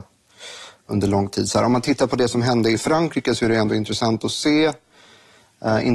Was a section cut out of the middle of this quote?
no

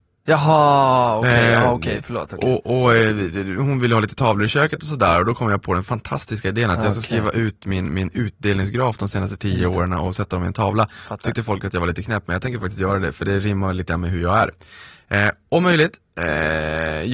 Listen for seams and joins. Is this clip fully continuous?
yes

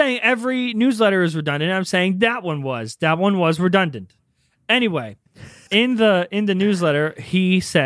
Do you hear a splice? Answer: yes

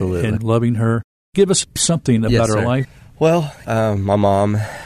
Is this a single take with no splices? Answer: no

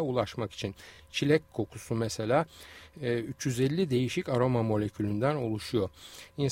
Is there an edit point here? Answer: no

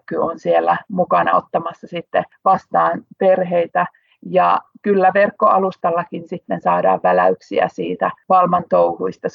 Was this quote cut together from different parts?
no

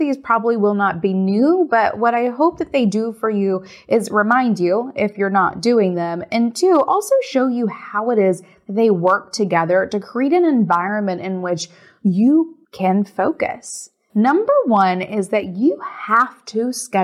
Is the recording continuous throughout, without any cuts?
no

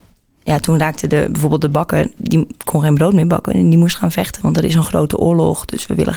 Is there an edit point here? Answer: yes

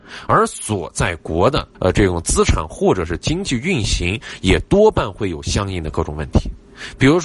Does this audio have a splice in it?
yes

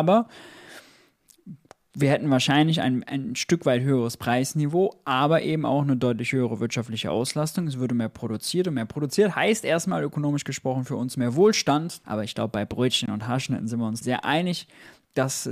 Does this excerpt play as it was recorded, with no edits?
no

